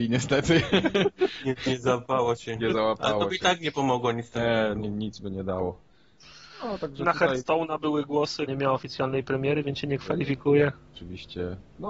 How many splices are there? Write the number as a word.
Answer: one